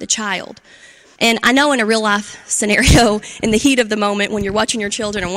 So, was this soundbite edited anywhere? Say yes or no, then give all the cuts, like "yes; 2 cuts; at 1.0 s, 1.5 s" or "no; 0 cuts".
yes; 1 cut; at 1.2 s